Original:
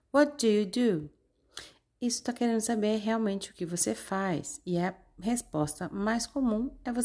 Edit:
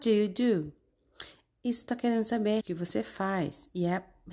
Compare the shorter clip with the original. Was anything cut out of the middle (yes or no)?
yes